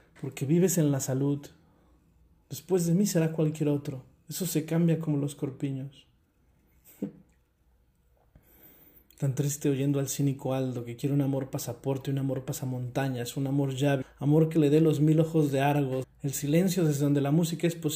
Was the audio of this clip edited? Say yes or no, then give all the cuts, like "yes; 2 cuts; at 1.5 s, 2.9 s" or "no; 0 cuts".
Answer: yes; 2 cuts; at 14.0 s, 16.0 s